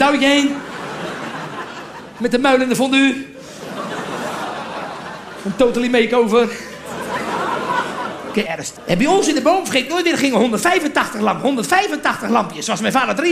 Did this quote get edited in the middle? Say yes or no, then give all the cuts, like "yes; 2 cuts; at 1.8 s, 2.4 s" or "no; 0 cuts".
yes; 1 cut; at 8.4 s